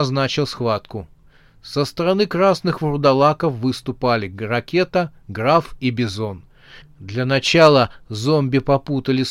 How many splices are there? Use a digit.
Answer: 1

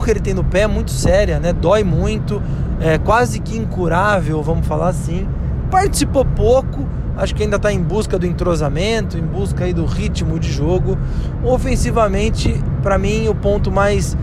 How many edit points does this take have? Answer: 1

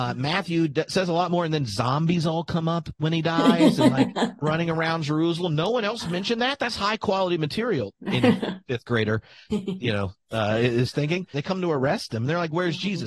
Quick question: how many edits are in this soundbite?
2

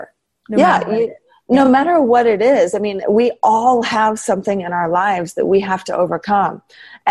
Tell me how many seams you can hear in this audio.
0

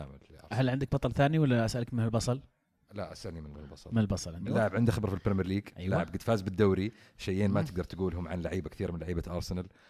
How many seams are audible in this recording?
1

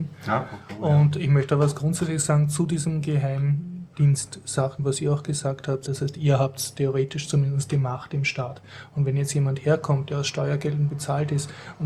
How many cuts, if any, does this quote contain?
1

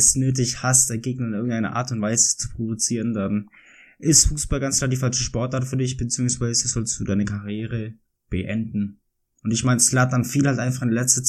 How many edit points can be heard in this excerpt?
0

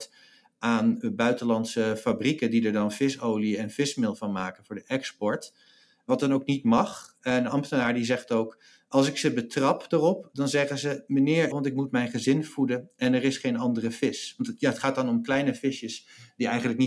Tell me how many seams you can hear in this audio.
1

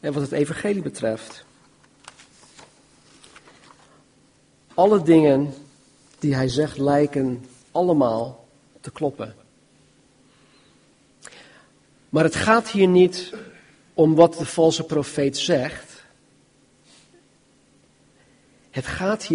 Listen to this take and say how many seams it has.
0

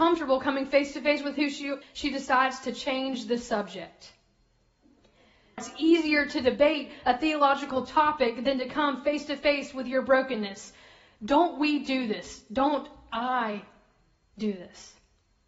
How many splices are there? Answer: 2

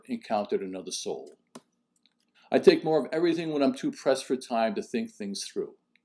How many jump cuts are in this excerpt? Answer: 1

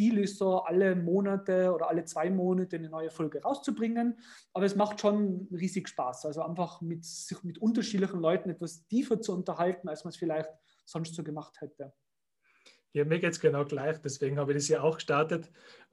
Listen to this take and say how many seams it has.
0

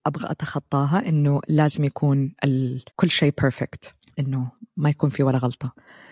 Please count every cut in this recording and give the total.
1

